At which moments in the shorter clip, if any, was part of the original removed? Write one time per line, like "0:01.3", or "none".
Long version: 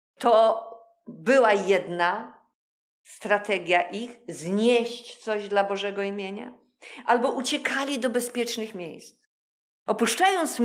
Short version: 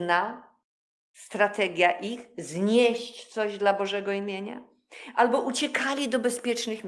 none